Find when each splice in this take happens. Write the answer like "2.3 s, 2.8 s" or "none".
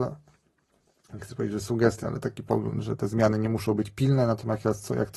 none